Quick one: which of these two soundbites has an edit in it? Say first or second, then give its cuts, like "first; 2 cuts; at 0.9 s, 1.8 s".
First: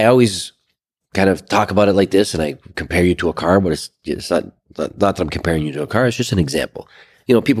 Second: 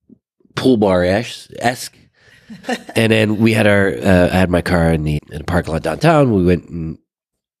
second; 1 cut; at 5.2 s